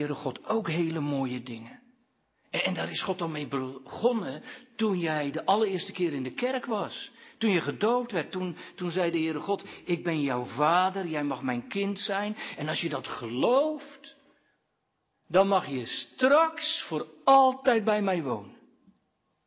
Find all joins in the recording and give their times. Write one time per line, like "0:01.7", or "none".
none